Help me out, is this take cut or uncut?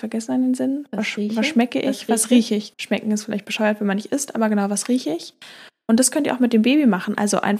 cut